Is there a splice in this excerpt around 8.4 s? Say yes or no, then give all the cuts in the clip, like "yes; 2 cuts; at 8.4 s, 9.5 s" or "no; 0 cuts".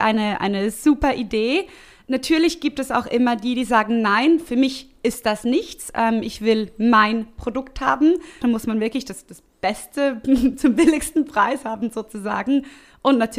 yes; 1 cut; at 8.4 s